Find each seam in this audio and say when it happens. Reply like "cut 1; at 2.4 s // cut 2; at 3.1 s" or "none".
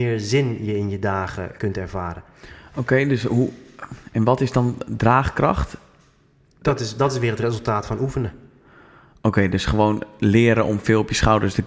cut 1; at 1.6 s